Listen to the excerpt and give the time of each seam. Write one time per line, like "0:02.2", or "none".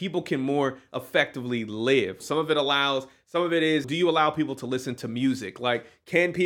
0:02.2
0:03.8